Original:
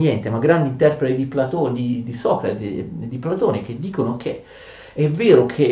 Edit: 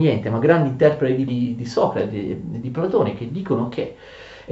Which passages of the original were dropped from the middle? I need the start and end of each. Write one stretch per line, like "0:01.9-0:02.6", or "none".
0:01.3-0:01.8